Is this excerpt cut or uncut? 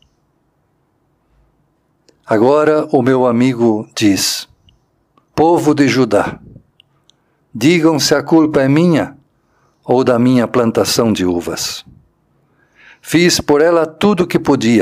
cut